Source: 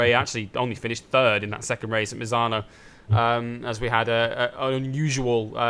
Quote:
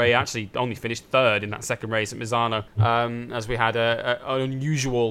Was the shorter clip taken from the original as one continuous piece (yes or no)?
no